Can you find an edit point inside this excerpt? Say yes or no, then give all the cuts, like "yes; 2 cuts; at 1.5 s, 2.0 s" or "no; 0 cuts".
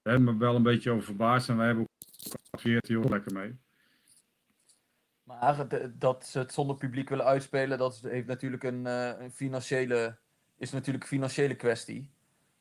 no; 0 cuts